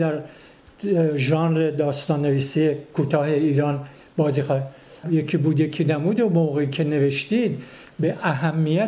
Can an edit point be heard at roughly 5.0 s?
yes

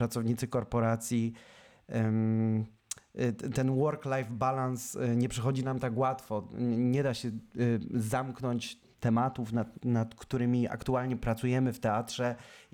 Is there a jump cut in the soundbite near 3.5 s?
no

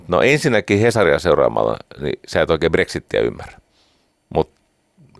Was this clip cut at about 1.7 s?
no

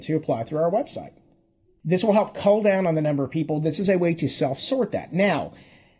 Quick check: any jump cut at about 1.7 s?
no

